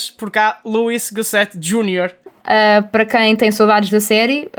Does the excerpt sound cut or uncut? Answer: cut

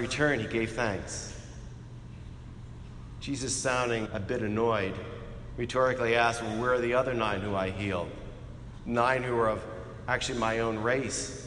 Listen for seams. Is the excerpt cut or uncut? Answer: cut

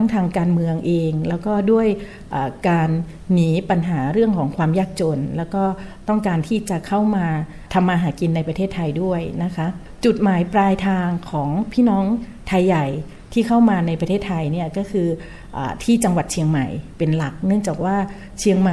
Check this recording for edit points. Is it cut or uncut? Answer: uncut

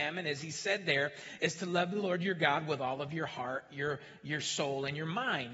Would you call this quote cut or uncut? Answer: uncut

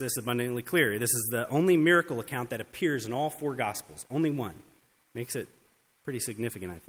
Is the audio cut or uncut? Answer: uncut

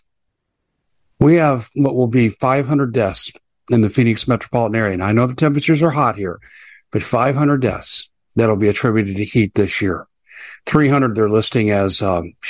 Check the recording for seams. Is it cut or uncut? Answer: uncut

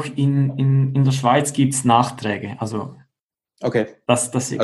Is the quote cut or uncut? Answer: uncut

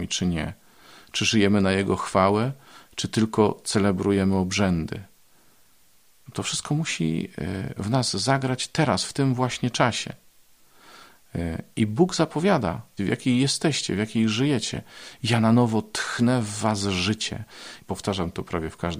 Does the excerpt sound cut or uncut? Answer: cut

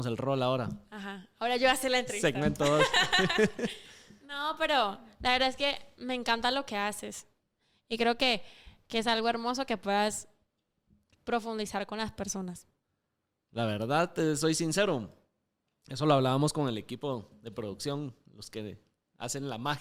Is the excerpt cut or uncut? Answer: uncut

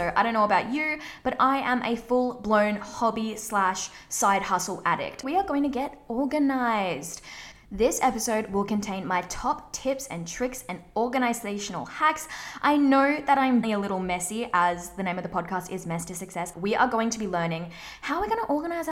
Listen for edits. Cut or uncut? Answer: cut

